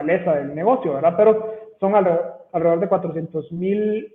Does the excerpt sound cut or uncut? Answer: uncut